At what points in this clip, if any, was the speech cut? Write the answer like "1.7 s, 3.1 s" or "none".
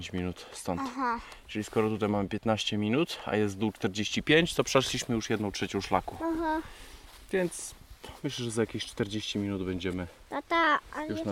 none